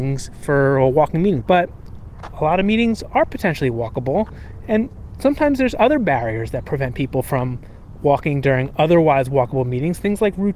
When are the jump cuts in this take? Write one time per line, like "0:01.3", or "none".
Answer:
0:01.4